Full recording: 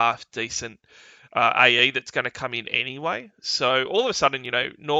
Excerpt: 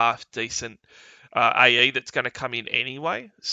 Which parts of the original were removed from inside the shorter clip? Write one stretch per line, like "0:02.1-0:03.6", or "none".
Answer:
none